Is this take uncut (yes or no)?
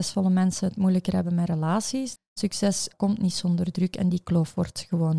no